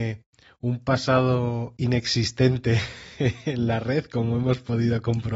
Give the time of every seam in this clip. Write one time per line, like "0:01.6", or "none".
none

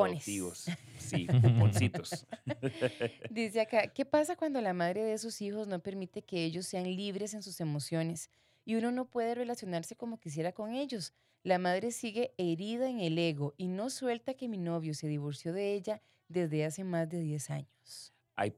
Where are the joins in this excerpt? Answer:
none

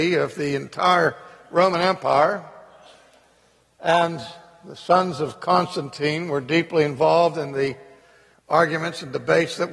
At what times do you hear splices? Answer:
0:08.3

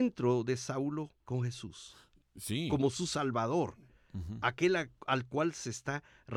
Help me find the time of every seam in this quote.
0:01.2

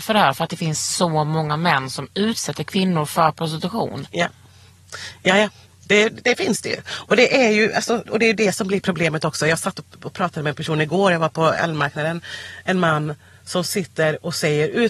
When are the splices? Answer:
none

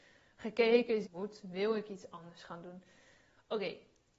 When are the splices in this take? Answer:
0:01.0

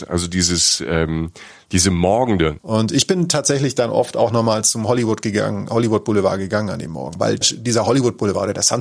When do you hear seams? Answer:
0:02.6
0:07.4

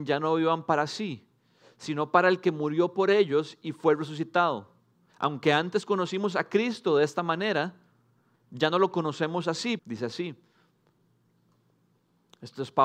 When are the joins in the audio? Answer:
0:05.1
0:09.8

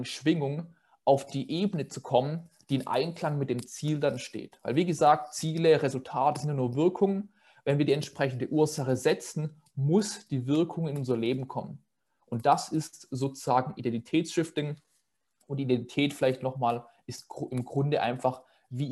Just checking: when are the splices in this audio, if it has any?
none

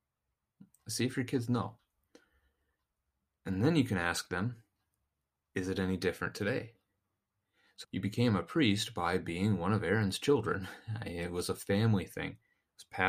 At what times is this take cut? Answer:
0:07.8

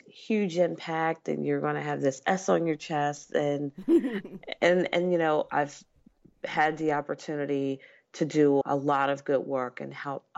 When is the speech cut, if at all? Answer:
0:08.6

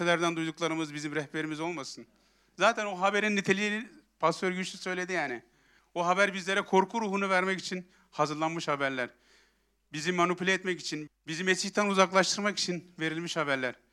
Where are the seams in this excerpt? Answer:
0:05.8
0:11.1

